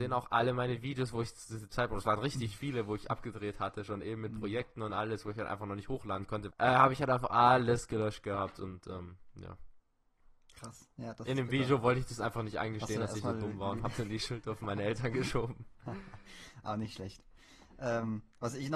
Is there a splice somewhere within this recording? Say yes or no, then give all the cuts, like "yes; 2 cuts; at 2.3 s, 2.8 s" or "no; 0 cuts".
yes; 1 cut; at 6.5 s